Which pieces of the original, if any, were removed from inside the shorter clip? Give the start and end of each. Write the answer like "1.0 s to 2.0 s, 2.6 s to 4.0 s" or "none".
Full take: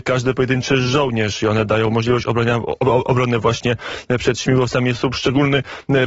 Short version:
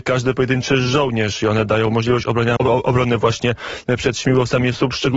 2.6 s to 2.8 s